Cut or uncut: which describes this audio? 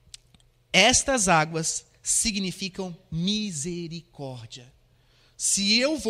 uncut